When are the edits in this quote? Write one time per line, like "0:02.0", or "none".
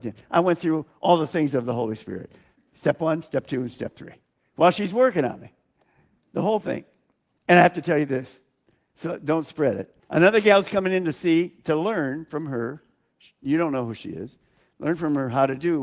0:10.0